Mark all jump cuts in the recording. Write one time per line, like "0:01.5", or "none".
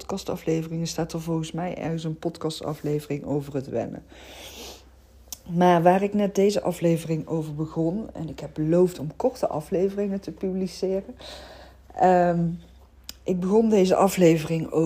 none